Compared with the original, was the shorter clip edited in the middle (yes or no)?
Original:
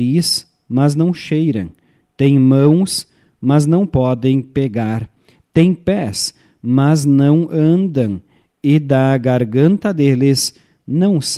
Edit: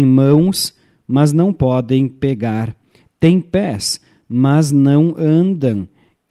no